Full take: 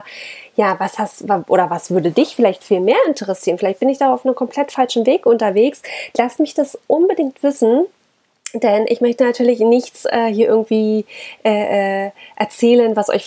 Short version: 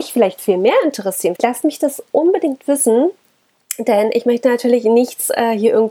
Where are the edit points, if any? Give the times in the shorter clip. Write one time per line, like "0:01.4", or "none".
0:01.4